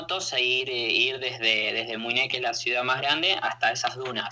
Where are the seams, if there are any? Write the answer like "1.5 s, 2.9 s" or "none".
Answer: none